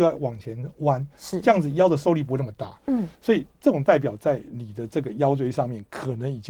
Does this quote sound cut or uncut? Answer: uncut